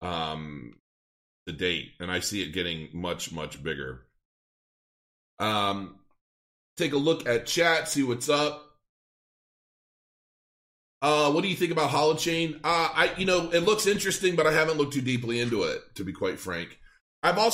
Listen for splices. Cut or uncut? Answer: uncut